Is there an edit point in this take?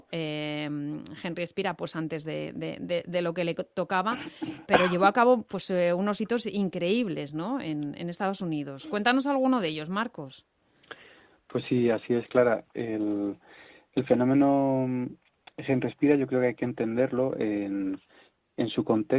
yes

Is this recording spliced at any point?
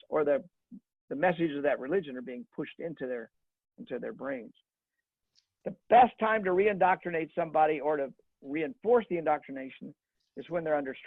no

